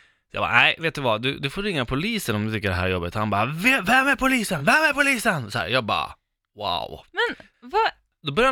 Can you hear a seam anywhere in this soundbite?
no; 0 cuts

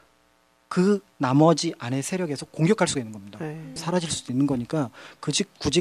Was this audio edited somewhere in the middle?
yes; 1 cut; at 3.8 s

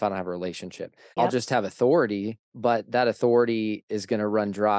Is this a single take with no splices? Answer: no; 2 cuts; at 1.2 s, 2.4 s

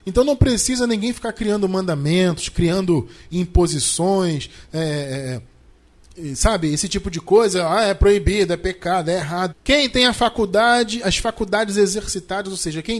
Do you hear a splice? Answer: yes; 1 cut; at 9.5 s

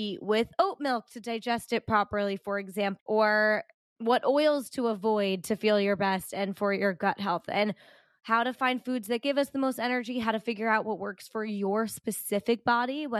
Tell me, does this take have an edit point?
yes; 1 cut; at 3.0 s

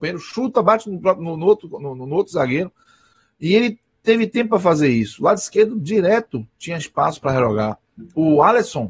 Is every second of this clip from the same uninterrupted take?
yes; 0 cuts

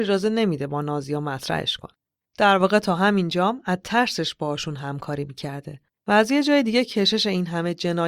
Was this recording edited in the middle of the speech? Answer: no; 0 cuts

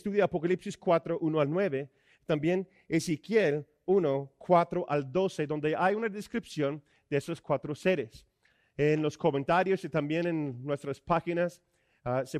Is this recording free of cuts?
yes; 0 cuts

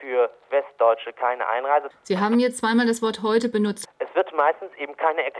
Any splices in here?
yes; 2 cuts; at 1.9 s, 3.8 s

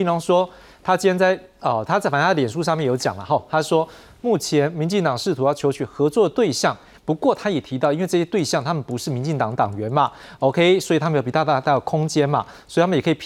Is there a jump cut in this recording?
yes; 1 cut; at 6.9 s

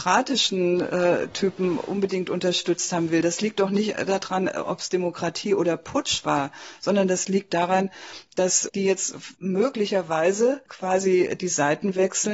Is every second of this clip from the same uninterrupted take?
yes; 0 cuts

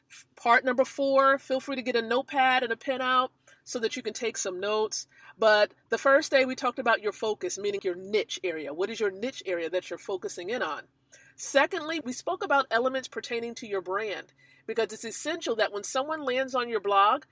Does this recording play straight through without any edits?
no; 2 cuts; at 7.8 s, 12.0 s

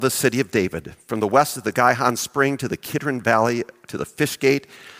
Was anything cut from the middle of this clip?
no; 0 cuts

